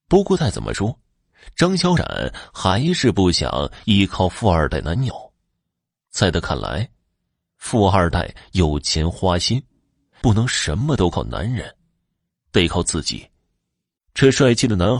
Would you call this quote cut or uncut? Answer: cut